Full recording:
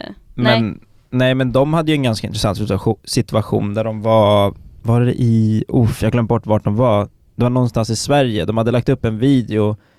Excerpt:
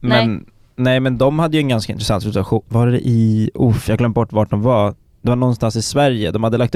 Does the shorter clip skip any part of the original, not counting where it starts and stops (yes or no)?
yes